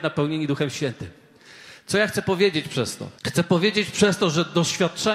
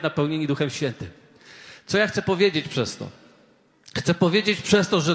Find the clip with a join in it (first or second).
first